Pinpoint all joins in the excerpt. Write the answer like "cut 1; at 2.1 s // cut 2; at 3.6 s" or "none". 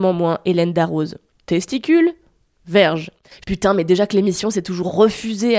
cut 1; at 1.3 s // cut 2; at 3.3 s